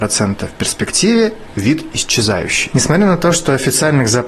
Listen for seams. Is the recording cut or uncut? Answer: cut